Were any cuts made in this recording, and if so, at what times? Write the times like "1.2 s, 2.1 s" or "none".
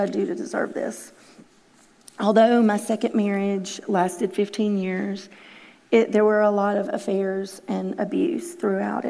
none